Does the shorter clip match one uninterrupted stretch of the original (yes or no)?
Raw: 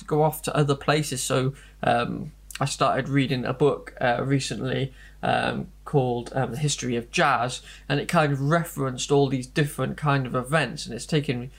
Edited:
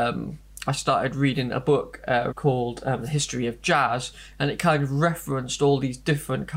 no